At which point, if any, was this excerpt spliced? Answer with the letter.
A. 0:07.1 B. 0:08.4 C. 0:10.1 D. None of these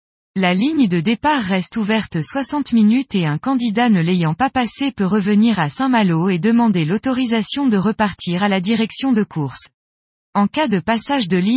D